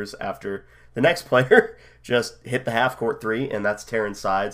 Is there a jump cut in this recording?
no; 0 cuts

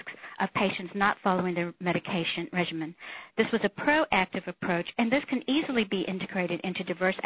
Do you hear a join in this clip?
no; 0 cuts

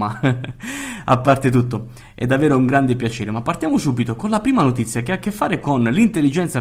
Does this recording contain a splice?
no; 0 cuts

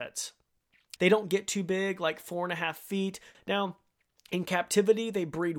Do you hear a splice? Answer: yes; 2 cuts; at 1.0 s, 3.3 s

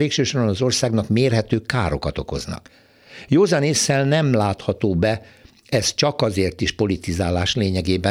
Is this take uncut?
yes; 0 cuts

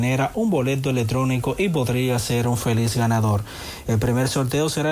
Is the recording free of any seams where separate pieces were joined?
yes; 0 cuts

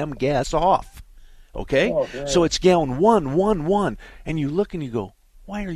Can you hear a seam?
no; 0 cuts

